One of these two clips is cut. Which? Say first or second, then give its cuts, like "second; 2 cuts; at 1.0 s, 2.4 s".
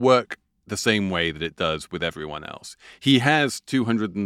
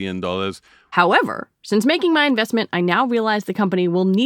second; 1 cut; at 0.9 s